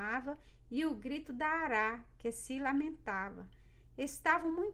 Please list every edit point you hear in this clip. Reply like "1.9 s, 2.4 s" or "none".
none